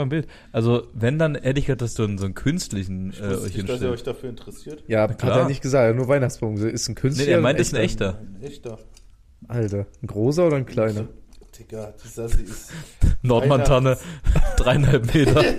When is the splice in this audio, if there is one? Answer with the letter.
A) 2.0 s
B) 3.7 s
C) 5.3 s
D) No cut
A